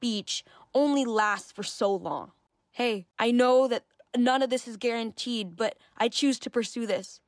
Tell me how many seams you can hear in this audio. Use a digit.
1